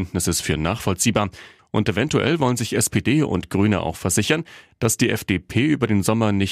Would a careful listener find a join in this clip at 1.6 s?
yes; 1 cut; at 1.6 s

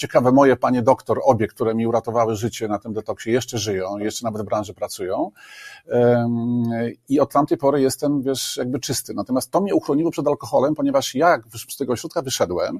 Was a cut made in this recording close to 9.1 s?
no; 0 cuts

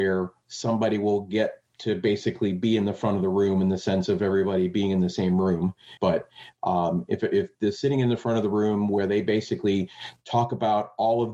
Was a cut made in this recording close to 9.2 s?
no; 1 cut; at 6.0 s

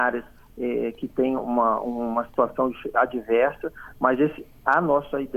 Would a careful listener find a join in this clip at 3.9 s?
no; 1 cut; at 1.4 s

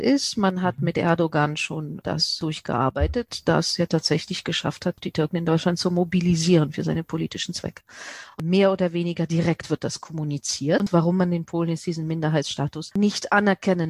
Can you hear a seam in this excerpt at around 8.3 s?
no; 0 cuts

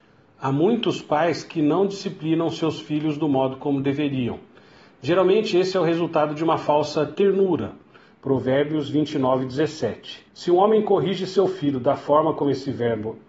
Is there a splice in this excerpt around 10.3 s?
yes; 2 cuts; at 8.1 s, 10.3 s

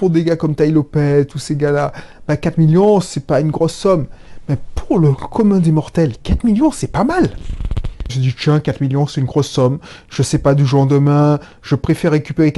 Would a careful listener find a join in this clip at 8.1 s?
yes; 1 cut; at 8.1 s

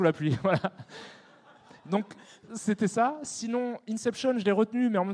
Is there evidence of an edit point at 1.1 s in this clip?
no; 0 cuts

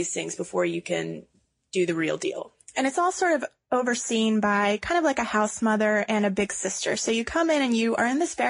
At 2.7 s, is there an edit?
no; 0 cuts

